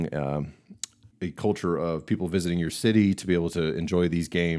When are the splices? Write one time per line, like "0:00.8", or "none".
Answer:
0:01.1